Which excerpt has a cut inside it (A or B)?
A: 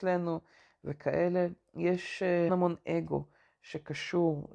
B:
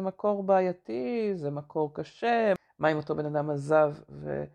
A